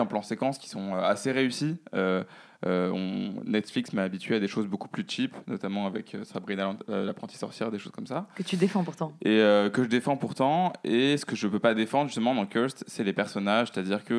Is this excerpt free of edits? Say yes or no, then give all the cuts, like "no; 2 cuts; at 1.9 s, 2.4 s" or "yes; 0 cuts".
yes; 0 cuts